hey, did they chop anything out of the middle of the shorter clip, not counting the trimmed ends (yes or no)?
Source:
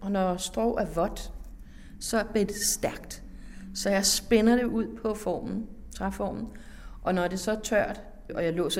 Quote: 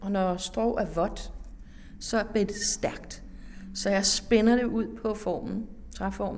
no